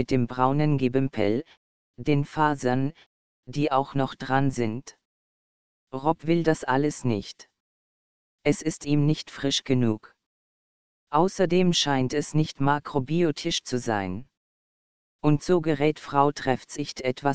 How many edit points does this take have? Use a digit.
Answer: 1